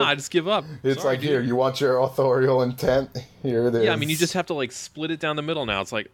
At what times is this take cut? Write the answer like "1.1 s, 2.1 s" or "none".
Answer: none